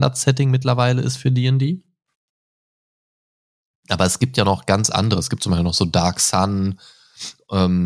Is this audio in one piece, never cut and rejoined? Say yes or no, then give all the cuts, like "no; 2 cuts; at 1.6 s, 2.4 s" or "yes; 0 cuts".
yes; 0 cuts